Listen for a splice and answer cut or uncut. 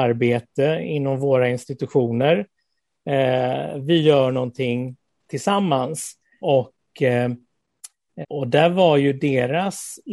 cut